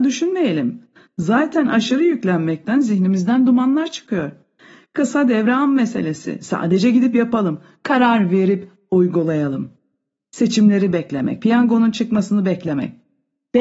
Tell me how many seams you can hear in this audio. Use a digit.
1